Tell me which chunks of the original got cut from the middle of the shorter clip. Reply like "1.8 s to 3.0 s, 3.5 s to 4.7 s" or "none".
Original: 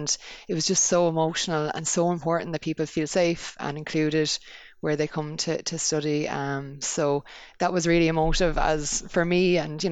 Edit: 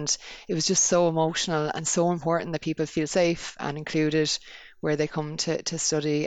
none